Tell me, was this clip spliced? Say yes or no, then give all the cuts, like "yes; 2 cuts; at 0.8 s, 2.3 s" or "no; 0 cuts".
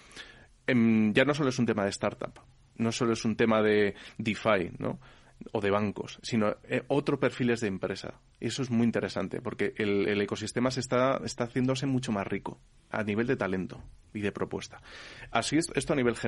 no; 0 cuts